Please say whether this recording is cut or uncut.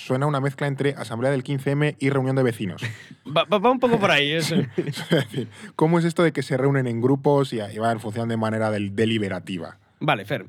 cut